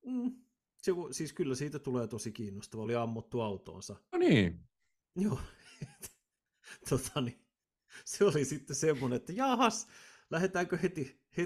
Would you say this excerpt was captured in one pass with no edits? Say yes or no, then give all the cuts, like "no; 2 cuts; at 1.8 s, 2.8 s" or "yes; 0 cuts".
no; 1 cut; at 2.8 s